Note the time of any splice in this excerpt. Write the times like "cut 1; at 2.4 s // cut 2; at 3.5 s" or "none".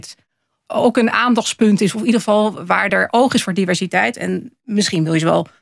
none